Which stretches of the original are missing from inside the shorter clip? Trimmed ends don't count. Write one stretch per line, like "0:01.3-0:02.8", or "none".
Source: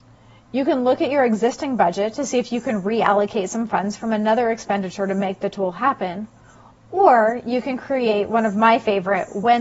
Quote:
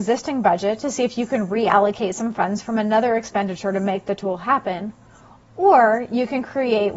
none

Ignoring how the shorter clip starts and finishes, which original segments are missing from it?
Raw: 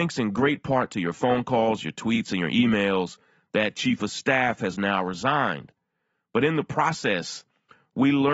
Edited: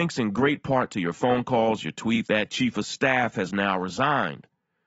0:02.2-0:03.5

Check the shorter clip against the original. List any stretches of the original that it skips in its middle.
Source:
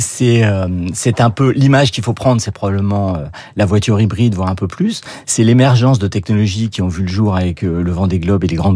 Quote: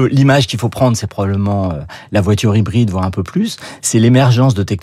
none

